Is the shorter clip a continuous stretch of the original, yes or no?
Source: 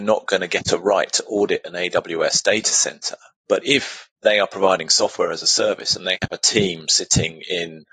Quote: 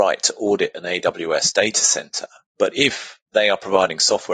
yes